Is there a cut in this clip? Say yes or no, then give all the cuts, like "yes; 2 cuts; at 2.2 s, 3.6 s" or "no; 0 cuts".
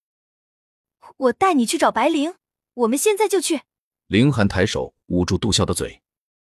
yes; 2 cuts; at 3.9 s, 5.5 s